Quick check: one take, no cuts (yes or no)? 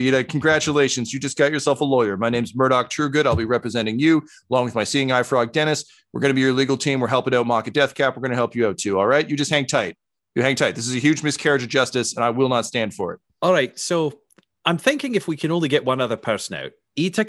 yes